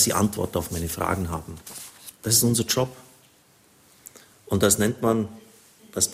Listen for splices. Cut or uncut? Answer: uncut